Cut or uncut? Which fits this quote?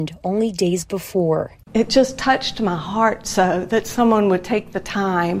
uncut